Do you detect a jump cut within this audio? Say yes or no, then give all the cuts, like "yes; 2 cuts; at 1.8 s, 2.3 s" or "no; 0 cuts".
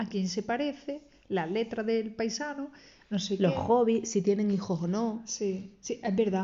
no; 0 cuts